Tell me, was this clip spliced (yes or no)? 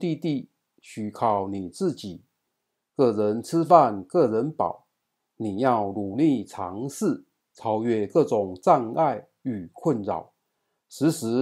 no